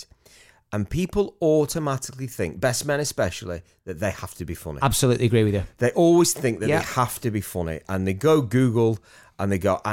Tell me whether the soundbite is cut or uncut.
uncut